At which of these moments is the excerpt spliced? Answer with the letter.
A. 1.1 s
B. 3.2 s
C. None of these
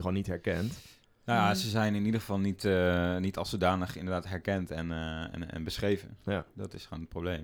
C